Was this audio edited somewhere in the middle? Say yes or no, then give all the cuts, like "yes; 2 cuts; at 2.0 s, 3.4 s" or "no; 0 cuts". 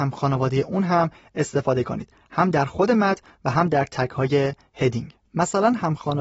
yes; 1 cut; at 5.2 s